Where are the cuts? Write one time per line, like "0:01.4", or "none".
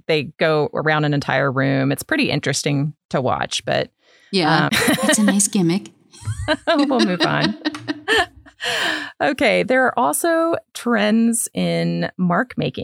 0:04.7